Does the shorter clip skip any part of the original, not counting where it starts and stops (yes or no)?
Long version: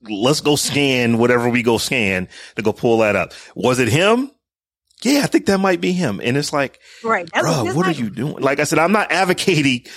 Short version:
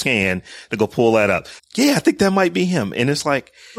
yes